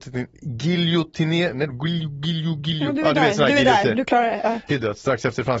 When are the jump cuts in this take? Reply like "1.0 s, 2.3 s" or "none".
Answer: 4.7 s